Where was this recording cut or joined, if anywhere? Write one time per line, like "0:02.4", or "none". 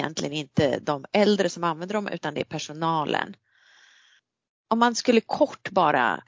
none